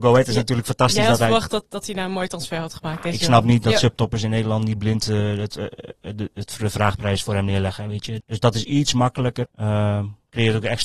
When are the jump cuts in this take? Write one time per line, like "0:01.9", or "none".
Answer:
0:08.2
0:09.4